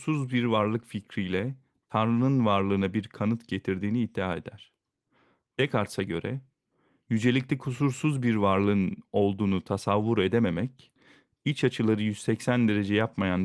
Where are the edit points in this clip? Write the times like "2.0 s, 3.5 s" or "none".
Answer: none